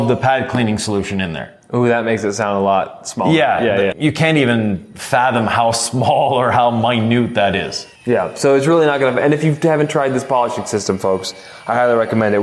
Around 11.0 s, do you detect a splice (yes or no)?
no